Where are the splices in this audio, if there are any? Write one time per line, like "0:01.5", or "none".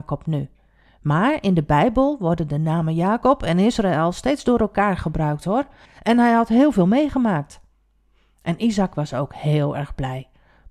0:05.9